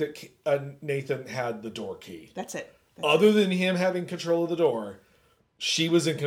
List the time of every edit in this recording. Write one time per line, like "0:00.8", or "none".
none

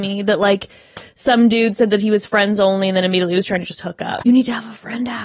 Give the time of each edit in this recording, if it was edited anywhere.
0:04.2

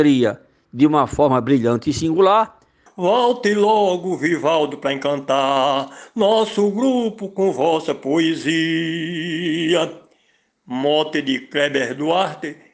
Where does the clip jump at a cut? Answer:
0:02.9

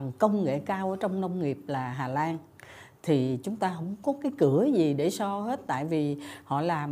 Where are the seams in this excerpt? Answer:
none

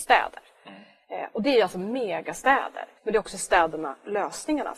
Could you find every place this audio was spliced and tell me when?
0:03.0

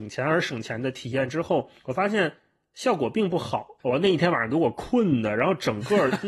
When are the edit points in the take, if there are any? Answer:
0:03.8

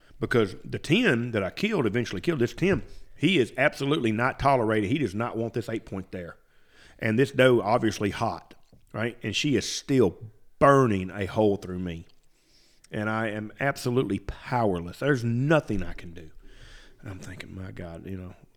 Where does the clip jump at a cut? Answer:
none

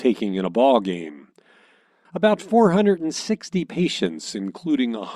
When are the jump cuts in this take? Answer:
0:02.1

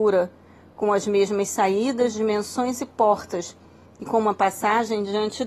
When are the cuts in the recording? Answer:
none

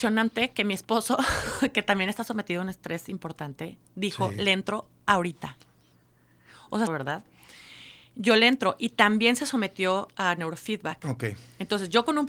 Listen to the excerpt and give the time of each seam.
0:06.9

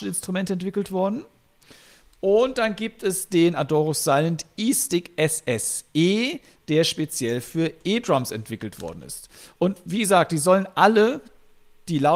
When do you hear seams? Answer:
none

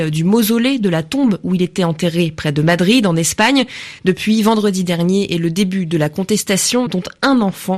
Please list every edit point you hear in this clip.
0:04.0
0:06.9

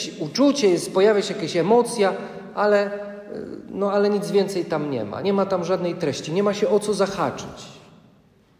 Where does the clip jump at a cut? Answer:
none

